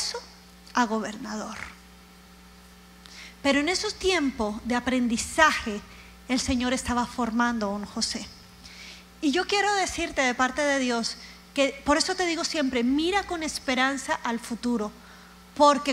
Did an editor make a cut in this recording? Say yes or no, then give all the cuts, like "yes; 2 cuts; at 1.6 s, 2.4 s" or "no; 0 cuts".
no; 0 cuts